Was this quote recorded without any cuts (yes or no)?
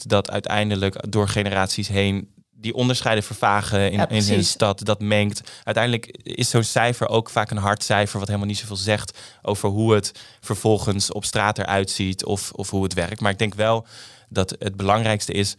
yes